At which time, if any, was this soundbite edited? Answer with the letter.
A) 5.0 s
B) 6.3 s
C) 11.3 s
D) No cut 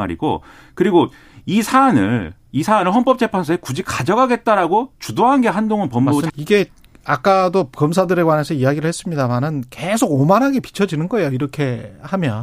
B